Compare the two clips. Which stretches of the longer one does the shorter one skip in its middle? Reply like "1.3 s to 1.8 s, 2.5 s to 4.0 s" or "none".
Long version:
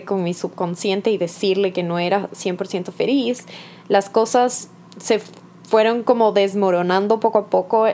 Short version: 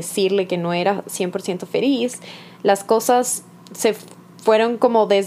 none